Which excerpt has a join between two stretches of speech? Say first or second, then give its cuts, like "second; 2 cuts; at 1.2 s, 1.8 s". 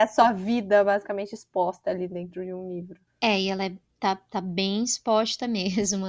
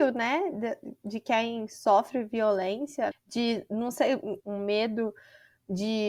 second; 2 cuts; at 3.1 s, 4.4 s